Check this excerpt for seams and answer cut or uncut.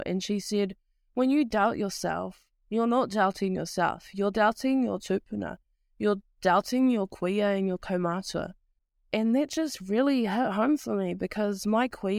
uncut